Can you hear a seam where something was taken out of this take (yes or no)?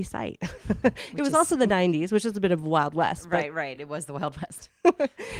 no